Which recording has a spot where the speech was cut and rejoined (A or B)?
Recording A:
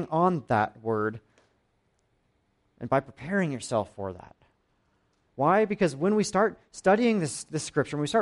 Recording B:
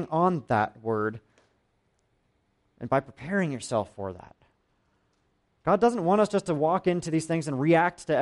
A